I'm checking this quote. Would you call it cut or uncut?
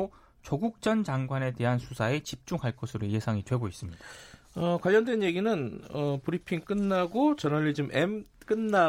uncut